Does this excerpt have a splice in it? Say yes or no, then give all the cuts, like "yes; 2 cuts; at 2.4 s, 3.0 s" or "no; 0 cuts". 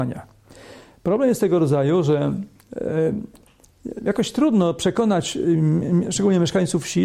no; 0 cuts